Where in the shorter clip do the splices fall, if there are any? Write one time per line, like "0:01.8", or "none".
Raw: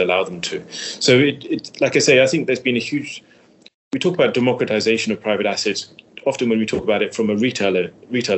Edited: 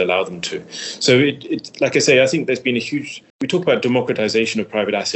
0:03.3